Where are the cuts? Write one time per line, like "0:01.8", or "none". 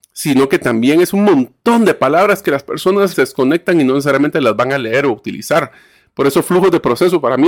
0:03.1